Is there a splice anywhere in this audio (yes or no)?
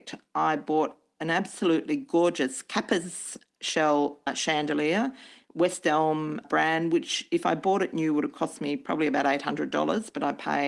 no